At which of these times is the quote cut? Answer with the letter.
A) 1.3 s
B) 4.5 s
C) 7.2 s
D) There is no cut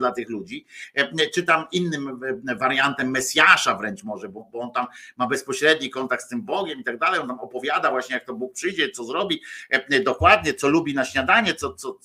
B